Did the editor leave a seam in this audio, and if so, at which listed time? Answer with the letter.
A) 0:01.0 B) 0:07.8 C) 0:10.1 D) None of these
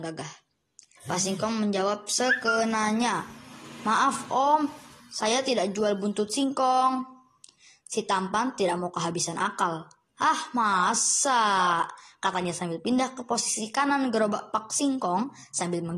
A